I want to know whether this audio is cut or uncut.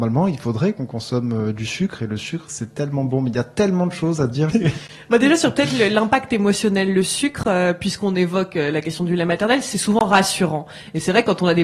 cut